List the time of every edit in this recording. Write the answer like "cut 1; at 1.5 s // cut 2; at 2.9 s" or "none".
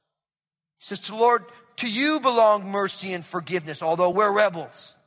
none